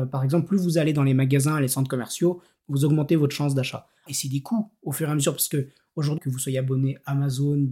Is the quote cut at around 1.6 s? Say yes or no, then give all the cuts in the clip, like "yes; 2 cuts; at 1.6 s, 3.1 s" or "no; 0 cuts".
no; 2 cuts; at 4.1 s, 6.2 s